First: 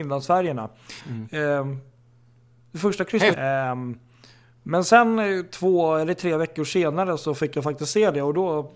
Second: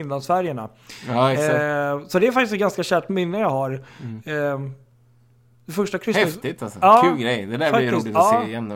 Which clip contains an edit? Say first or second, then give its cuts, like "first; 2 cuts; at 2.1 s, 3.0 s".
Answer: first; 2 cuts; at 1.0 s, 3.3 s